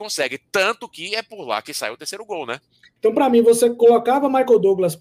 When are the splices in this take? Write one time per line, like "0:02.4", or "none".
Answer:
0:03.0